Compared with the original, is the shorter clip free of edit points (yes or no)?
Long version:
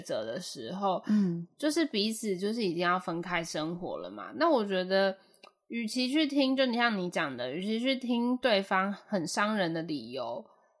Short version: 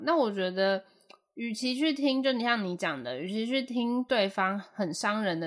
yes